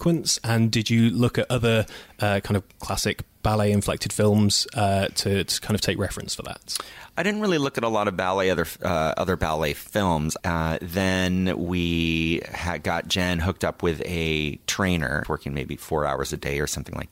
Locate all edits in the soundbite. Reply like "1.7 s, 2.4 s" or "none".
10.4 s, 15.2 s